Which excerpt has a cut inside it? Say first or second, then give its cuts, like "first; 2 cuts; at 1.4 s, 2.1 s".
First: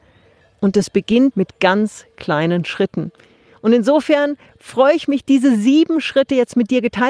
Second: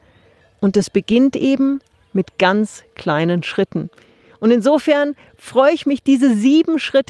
first; 1 cut; at 1.3 s